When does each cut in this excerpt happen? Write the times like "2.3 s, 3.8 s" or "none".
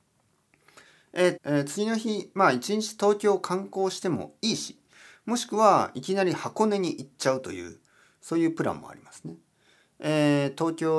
1.4 s